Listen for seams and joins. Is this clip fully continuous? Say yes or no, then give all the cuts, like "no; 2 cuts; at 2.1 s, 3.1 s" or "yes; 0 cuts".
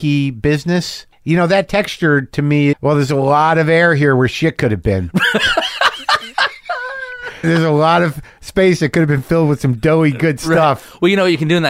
no; 3 cuts; at 1.1 s, 2.7 s, 7.4 s